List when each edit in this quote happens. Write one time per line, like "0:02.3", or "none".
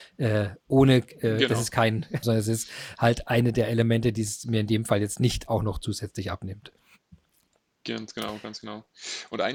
0:02.2